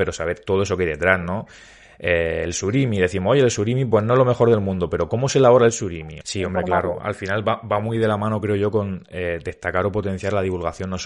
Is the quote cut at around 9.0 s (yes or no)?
no